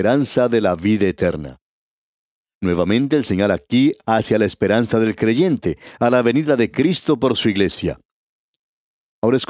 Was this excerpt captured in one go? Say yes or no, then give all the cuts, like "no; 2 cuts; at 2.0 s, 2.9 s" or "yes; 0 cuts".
yes; 0 cuts